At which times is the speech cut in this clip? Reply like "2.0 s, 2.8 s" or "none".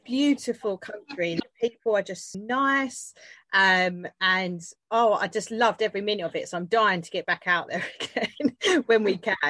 2.3 s

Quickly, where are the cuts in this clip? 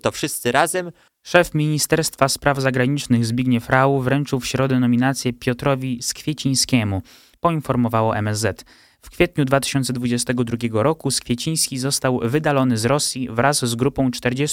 1.1 s, 7.3 s

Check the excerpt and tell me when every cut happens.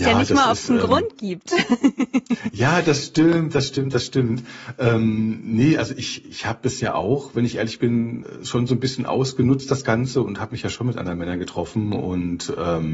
none

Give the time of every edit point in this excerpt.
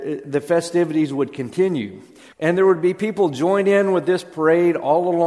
2.3 s

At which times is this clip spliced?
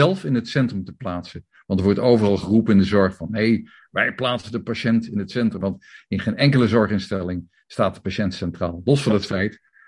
5.6 s

